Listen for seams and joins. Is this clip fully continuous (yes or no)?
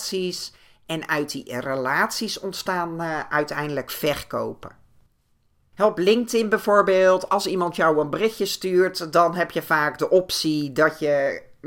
yes